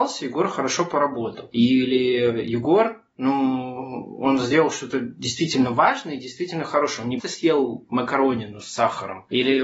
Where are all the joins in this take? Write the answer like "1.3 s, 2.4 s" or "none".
7.2 s